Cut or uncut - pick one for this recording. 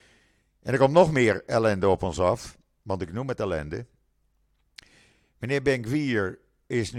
uncut